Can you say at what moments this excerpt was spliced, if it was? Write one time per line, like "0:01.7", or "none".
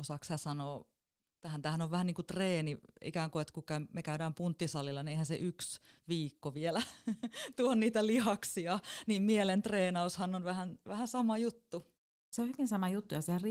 none